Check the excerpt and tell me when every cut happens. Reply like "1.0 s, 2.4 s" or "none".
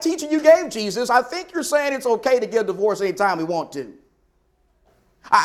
none